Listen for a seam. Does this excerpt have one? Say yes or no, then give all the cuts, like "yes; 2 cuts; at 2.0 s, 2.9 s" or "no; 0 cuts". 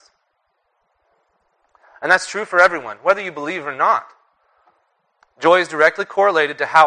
no; 0 cuts